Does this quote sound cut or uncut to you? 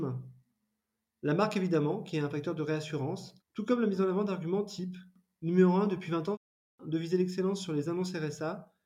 cut